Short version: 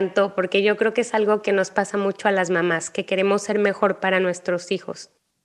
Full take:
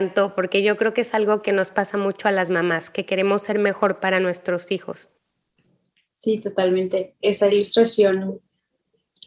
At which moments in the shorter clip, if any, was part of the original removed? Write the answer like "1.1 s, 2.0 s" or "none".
none